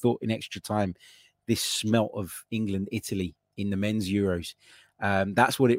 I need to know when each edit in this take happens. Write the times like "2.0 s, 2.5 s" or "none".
none